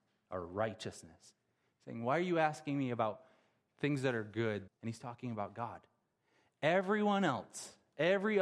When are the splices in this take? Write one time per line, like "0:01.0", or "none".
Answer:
0:04.7